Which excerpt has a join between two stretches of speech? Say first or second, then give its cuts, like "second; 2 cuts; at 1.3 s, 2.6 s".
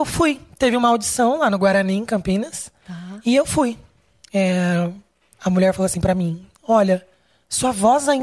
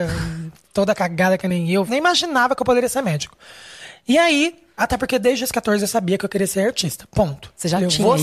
second; 2 cuts; at 1.9 s, 4.8 s